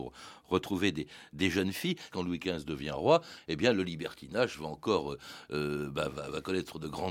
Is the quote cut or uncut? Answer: cut